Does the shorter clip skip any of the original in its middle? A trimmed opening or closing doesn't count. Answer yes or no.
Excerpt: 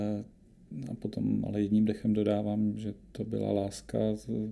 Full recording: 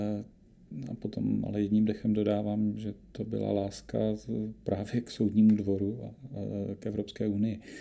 no